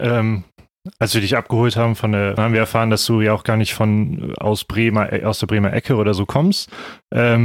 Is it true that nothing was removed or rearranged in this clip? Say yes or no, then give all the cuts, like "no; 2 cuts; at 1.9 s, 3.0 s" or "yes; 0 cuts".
no; 1 cut; at 2.4 s